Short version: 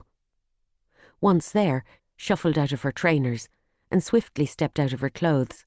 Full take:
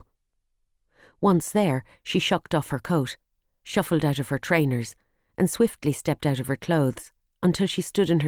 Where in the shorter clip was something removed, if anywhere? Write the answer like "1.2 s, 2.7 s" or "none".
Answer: 2.0 s